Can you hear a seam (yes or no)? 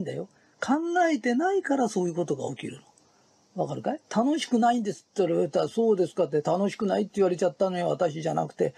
yes